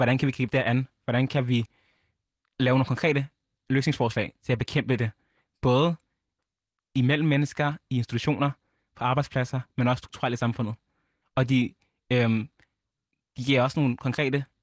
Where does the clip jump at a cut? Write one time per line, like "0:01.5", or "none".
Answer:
0:11.2